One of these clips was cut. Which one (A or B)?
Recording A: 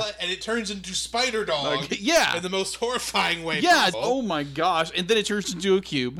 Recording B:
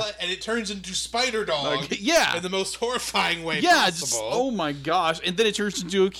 A